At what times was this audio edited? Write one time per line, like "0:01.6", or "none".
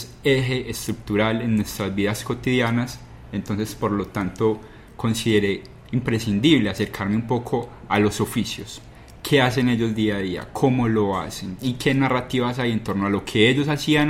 none

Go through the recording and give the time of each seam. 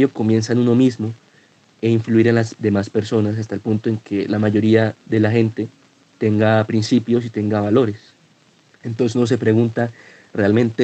0:05.0
0:08.8

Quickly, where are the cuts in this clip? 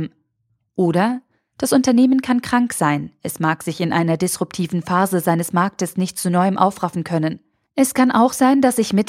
none

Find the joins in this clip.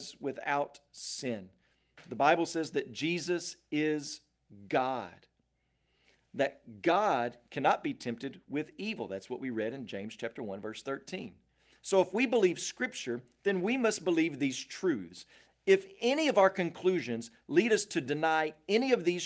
none

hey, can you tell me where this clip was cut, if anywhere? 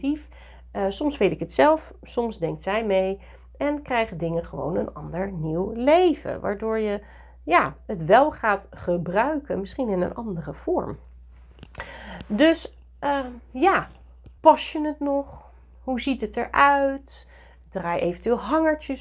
0:14.4

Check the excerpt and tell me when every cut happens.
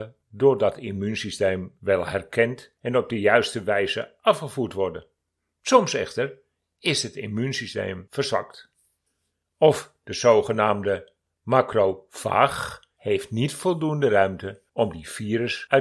none

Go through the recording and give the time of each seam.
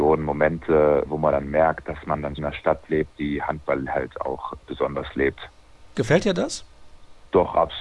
0:02.4
0:05.9

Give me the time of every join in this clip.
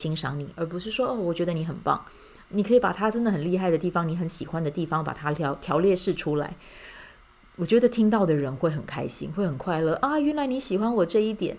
none

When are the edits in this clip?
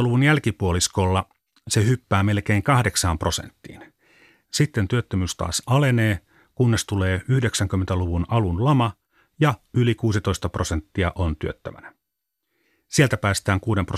0:04.4

